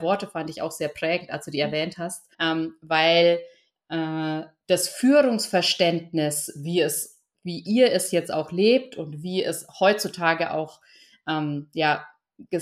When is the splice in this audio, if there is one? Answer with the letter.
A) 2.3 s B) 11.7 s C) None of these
A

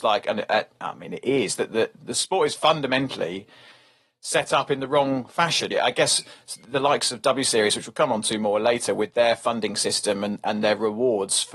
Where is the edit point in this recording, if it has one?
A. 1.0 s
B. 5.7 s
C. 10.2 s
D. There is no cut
B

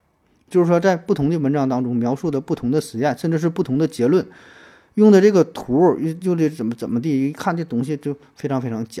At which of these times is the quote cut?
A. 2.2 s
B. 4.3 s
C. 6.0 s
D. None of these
D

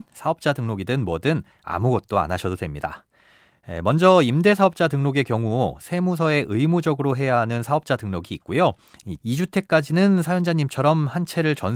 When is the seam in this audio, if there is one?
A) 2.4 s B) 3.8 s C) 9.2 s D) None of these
C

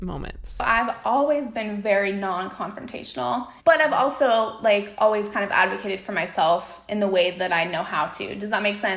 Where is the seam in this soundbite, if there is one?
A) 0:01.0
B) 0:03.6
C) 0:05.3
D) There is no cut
B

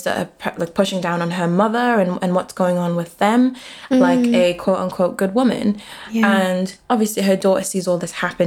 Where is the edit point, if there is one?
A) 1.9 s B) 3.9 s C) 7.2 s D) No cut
B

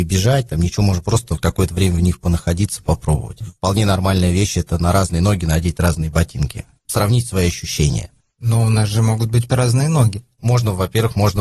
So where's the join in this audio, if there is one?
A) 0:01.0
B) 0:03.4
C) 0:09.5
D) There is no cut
C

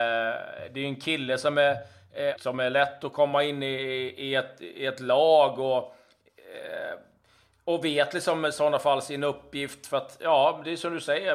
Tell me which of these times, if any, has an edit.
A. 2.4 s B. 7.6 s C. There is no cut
A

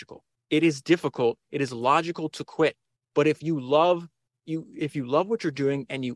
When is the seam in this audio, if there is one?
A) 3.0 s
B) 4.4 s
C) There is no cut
C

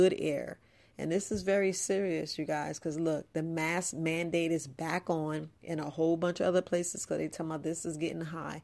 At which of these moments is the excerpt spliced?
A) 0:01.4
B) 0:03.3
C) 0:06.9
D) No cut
D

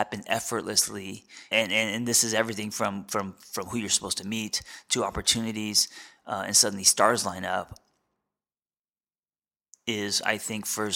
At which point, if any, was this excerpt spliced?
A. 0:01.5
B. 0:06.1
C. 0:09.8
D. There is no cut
A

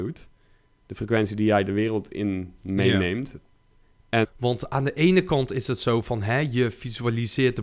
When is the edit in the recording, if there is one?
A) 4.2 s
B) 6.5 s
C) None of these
A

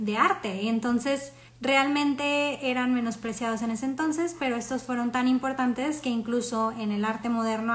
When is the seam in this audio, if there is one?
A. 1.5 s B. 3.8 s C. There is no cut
A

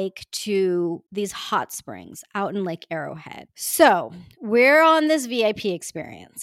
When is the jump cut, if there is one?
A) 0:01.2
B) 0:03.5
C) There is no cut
B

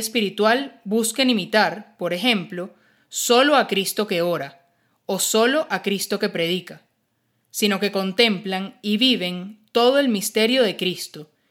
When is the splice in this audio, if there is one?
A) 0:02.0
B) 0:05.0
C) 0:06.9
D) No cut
D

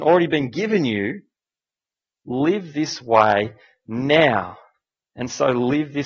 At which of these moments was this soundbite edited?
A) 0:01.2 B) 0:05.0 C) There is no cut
B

